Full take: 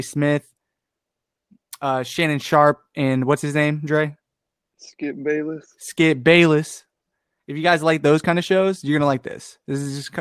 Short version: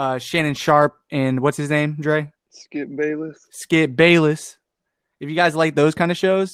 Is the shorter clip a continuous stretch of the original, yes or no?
no